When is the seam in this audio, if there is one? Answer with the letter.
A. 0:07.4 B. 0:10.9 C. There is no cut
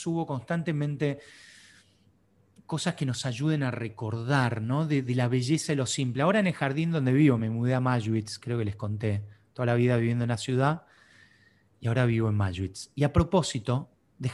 C